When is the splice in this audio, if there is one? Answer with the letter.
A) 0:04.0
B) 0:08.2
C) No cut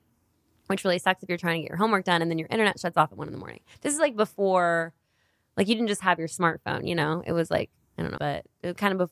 B